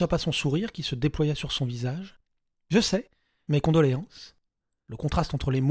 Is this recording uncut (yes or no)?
yes